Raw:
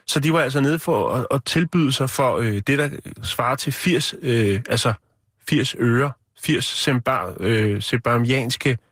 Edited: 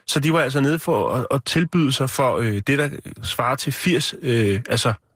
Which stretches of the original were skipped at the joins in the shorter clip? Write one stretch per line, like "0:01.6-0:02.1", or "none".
none